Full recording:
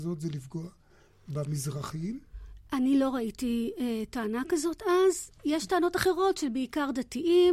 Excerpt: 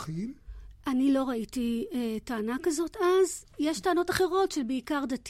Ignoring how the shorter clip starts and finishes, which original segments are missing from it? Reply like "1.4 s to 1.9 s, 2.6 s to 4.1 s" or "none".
none